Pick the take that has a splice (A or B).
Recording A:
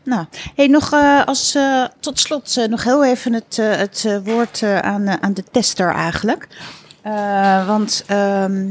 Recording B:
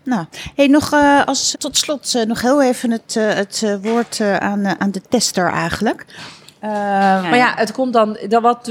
B